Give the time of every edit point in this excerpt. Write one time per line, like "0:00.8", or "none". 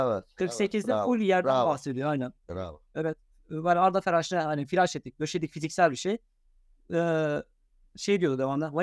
0:02.9